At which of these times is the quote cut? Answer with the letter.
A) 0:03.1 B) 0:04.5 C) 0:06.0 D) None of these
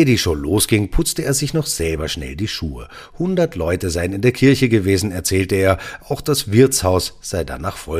D